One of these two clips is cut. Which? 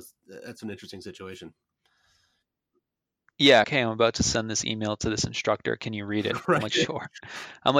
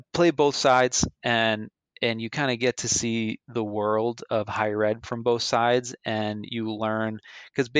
first; 1 cut; at 3.6 s

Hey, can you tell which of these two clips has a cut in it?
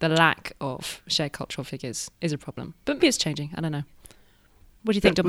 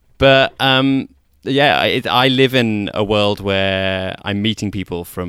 first; 1 cut; at 3.0 s

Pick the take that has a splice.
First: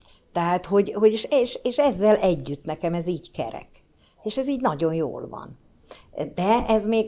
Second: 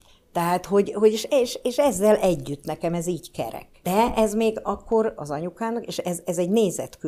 second; 2 cuts; at 3.8 s, 5.2 s

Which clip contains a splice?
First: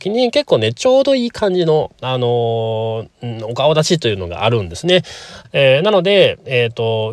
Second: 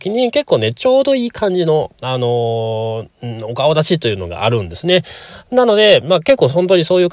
first; 1 cut; at 5.4 s

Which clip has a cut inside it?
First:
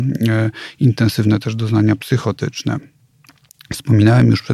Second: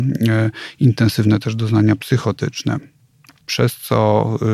second; 1 cut; at 3.4 s

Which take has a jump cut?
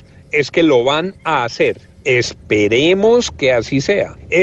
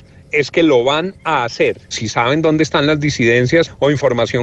second; 1 cut; at 1.9 s

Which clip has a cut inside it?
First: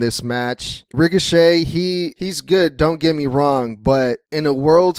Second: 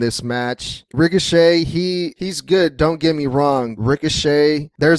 second; 1 cut; at 3.8 s

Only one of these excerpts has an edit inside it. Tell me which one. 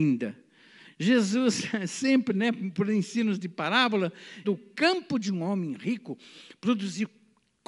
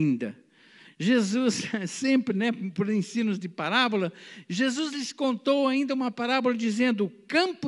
first; 1 cut; at 4.4 s

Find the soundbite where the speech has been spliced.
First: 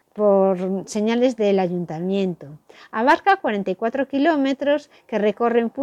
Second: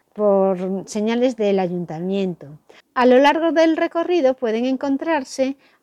second; 1 cut; at 2.8 s

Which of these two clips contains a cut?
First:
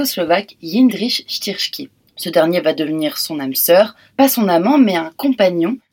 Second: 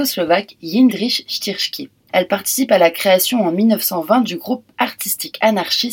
second; 1 cut; at 2.1 s

